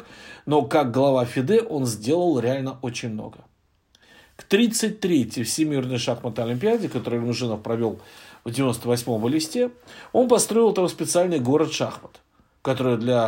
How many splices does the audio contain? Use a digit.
0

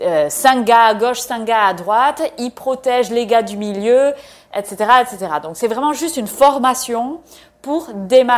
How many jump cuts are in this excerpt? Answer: 0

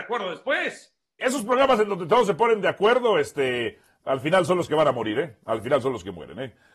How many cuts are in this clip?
1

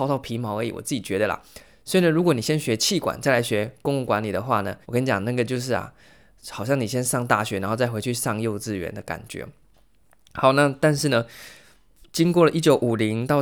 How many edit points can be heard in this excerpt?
1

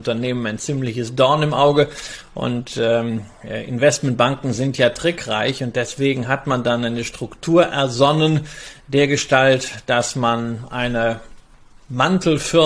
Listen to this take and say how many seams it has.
0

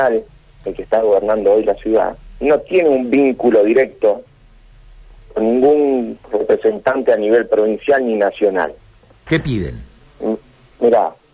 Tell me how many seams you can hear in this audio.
1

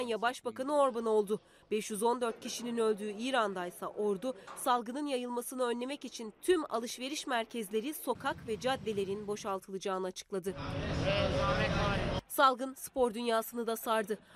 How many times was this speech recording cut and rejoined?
0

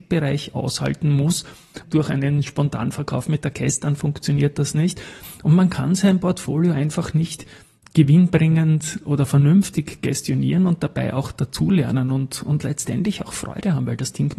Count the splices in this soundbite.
1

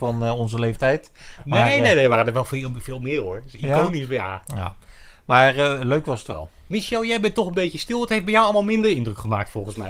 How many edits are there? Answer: 0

